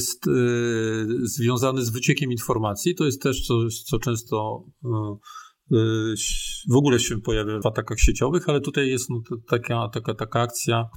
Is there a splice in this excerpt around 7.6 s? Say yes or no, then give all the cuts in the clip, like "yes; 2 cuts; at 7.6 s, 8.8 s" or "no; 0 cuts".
yes; 1 cut; at 7.6 s